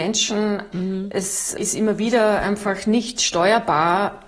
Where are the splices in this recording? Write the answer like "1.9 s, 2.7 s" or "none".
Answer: none